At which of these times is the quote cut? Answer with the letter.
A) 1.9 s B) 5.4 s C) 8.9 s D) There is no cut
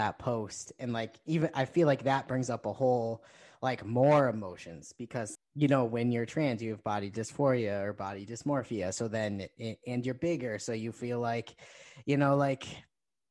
B